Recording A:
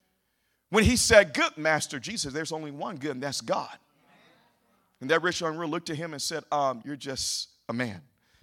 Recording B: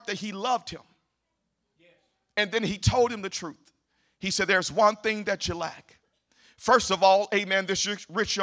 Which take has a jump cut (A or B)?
A